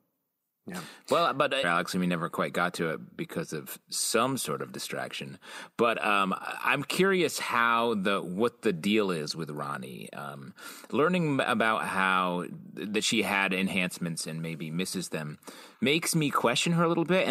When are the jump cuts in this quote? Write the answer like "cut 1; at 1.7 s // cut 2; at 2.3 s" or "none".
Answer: cut 1; at 1.6 s